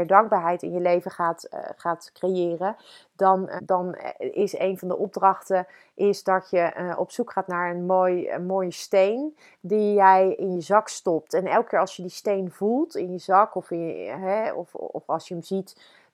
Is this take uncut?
no; 1 cut; at 3.6 s

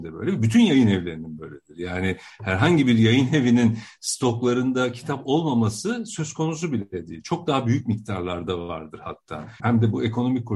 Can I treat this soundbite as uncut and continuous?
no; 1 cut; at 9.6 s

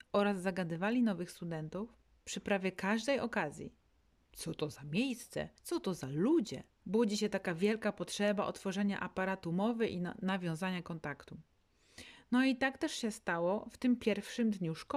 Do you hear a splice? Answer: yes; 2 cuts; at 5.6 s, 6.8 s

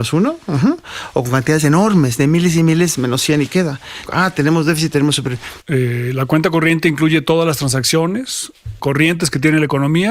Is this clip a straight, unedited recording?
no; 3 cuts; at 4.0 s, 5.6 s, 8.8 s

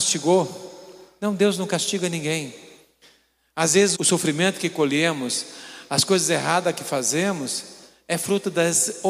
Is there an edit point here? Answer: yes; 1 cut; at 3.9 s

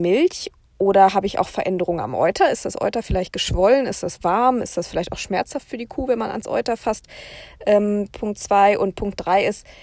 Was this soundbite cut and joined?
no; 0 cuts

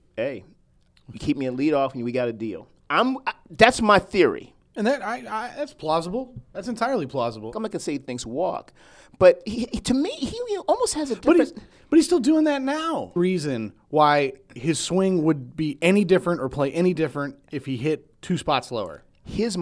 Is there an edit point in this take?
yes; 2 cuts; at 7.5 s, 13.2 s

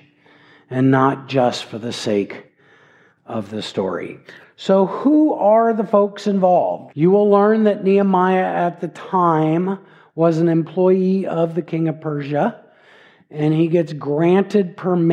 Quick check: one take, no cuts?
no; 1 cut; at 6.9 s

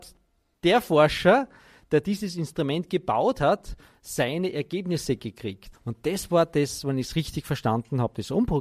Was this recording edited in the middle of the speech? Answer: yes; 1 cut; at 5.7 s

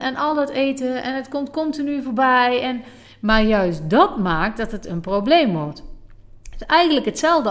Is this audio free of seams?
yes; 0 cuts

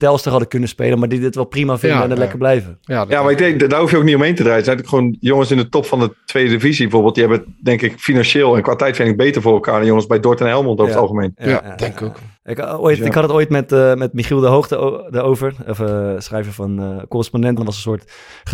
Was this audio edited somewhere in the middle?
yes; 2 cuts; at 12.4 s, 17.6 s

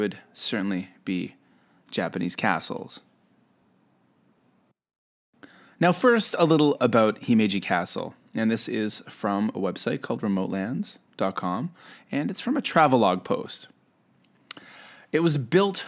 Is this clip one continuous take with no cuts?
yes; 0 cuts

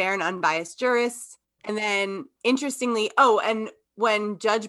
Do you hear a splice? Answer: yes; 1 cut; at 1.6 s

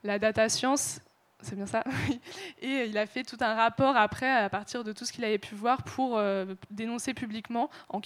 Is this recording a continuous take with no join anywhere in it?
yes; 0 cuts

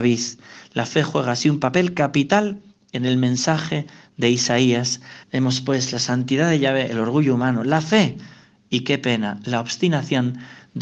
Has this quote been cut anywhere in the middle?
yes; 1 cut; at 5.2 s

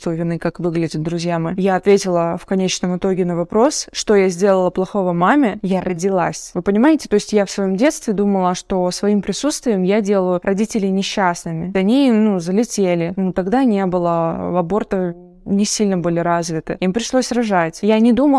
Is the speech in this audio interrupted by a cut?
no; 0 cuts

